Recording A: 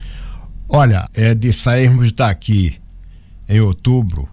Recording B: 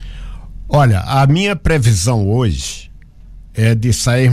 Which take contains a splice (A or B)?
A